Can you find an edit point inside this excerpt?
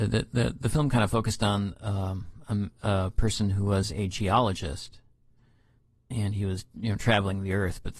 no; 0 cuts

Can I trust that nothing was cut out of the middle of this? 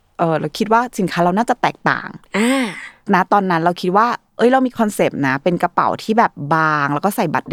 yes; 0 cuts

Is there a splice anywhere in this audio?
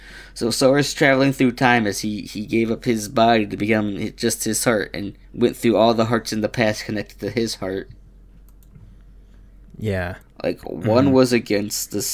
yes; 2 cuts; at 5.2 s, 10.2 s

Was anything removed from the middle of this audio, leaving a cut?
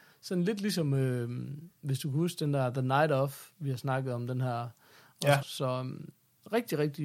yes; 1 cut; at 5.4 s

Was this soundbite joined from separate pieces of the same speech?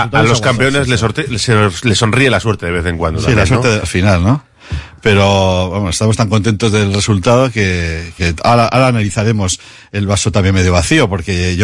yes; 2 cuts; at 3.8 s, 8.2 s

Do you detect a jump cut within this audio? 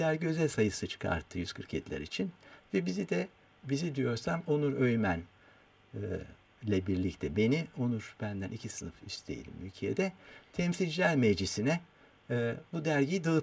no; 0 cuts

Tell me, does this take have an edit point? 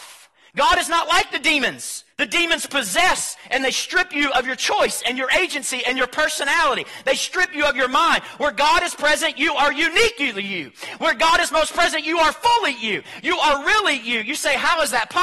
yes; 1 cut; at 2.1 s

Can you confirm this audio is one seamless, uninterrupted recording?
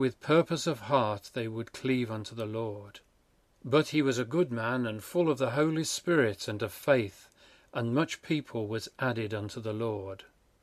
yes; 0 cuts

